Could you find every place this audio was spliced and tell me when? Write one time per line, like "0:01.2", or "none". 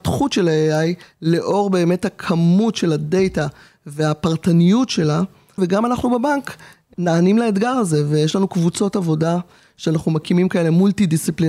0:05.6